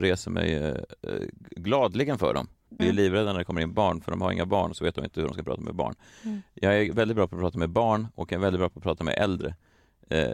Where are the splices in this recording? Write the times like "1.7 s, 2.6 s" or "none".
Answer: 2.8 s